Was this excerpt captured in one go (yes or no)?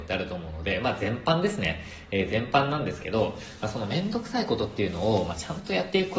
yes